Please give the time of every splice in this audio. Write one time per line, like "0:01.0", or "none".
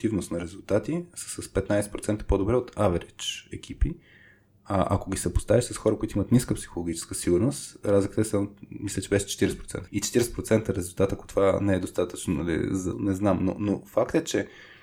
0:09.9
0:12.9

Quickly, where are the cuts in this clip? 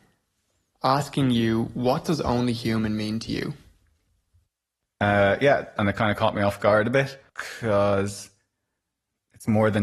0:05.8
0:07.3

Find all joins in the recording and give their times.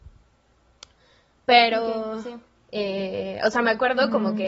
0:02.6

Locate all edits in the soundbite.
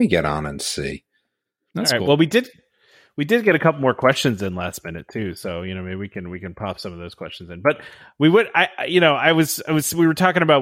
none

